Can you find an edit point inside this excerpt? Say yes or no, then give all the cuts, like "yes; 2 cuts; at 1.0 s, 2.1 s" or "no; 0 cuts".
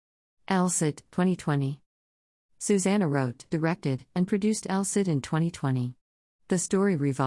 no; 0 cuts